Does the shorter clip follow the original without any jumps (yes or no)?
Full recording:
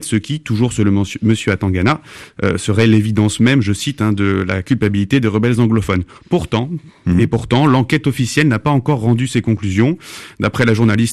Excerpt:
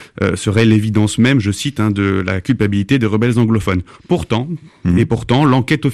yes